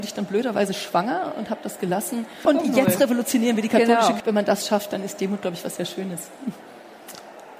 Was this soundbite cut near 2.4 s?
yes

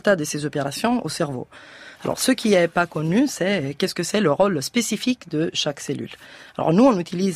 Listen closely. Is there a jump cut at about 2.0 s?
yes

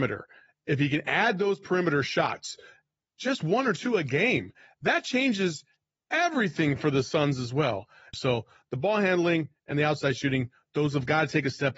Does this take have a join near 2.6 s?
no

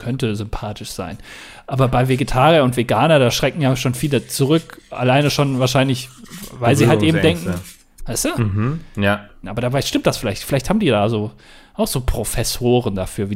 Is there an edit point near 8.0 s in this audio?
yes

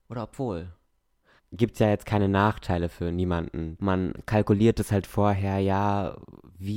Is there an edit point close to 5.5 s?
no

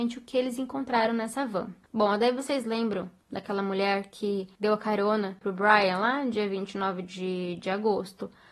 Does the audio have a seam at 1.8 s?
no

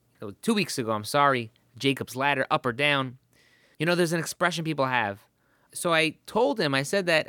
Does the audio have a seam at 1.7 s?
no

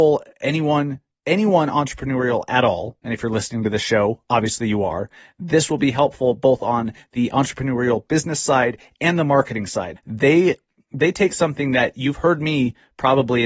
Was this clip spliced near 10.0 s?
yes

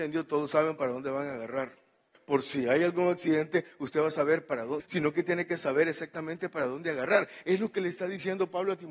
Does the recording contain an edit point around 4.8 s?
yes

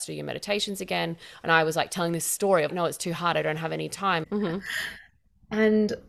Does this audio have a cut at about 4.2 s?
yes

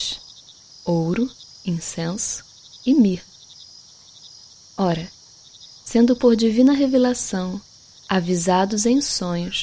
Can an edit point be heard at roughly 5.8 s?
no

